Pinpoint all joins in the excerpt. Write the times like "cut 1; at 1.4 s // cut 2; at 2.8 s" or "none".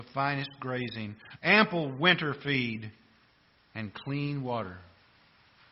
cut 1; at 1.4 s